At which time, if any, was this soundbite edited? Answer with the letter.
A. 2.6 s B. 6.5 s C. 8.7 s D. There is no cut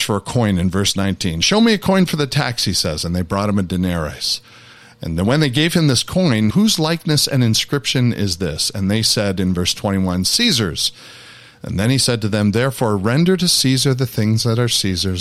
B